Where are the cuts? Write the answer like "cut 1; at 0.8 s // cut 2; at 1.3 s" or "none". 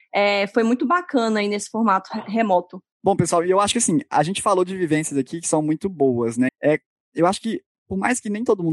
cut 1; at 2.9 s // cut 2; at 6.5 s